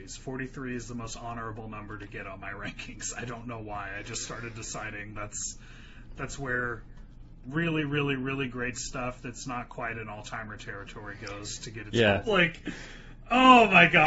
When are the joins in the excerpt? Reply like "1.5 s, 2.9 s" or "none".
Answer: 12.2 s